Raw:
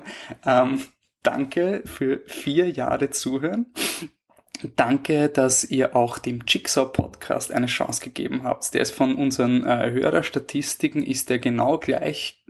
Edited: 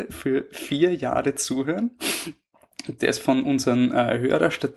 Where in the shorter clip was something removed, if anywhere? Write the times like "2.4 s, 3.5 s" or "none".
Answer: 3.0 s